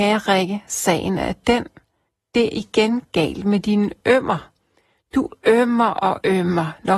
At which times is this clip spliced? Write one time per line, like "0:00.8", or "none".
0:02.5